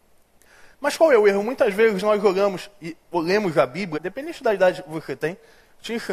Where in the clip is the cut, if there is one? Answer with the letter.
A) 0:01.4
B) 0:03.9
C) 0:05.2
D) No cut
B